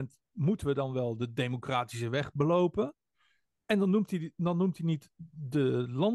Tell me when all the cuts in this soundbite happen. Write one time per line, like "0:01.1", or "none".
none